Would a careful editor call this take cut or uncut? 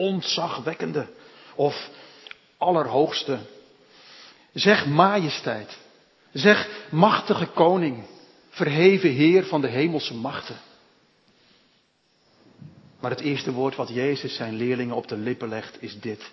uncut